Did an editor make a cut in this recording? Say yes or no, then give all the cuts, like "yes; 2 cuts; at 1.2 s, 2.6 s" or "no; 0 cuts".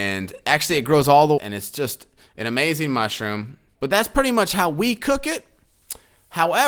yes; 2 cuts; at 1.4 s, 3.8 s